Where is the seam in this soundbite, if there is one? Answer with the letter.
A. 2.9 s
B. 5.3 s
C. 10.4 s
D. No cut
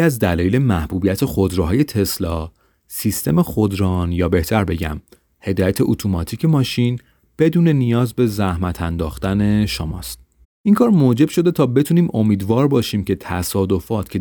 C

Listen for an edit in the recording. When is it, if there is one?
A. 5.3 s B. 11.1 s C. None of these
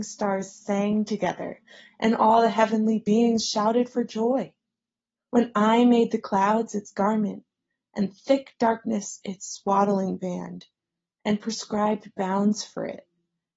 A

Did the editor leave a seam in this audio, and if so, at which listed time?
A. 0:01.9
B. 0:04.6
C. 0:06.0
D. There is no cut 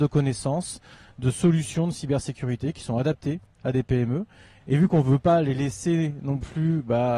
B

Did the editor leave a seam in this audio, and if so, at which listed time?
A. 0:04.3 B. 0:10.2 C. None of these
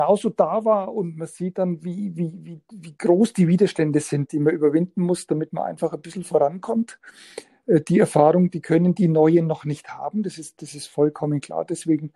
A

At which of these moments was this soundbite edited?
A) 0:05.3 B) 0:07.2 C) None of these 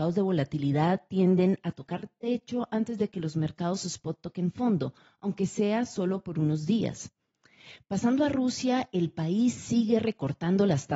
C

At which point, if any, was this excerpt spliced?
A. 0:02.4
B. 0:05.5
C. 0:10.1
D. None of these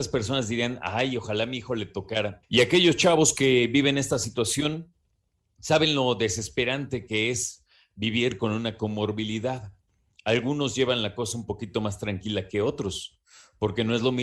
A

